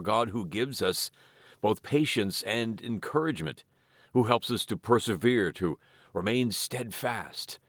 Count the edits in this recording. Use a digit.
0